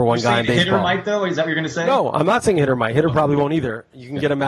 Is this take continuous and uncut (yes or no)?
yes